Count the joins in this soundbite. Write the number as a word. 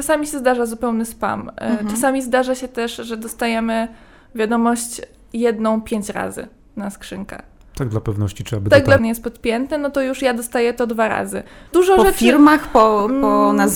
two